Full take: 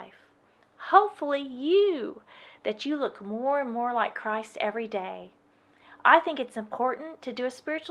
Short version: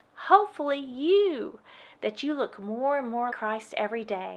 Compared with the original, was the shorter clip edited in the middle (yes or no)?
yes